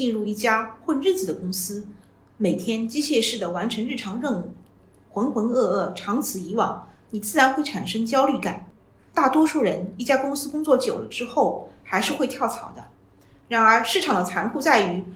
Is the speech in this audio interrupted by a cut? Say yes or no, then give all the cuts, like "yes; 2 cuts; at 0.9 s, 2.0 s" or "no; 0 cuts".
no; 0 cuts